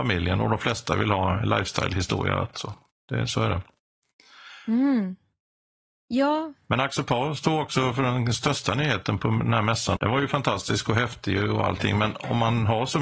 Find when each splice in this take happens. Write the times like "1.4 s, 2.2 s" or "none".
10.0 s